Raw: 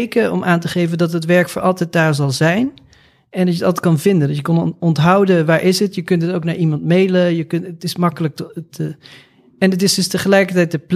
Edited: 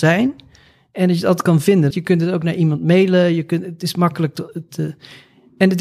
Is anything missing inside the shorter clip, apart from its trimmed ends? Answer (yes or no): yes